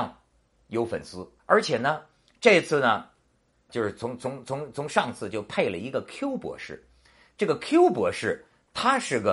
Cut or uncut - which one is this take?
cut